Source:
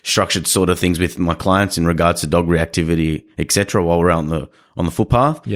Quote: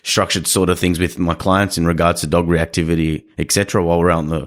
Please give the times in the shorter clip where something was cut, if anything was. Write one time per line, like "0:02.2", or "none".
none